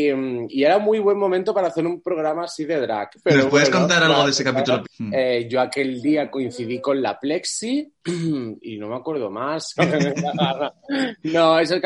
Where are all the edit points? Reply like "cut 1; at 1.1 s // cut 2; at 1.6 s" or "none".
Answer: cut 1; at 3.2 s // cut 2; at 4.8 s // cut 3; at 9.8 s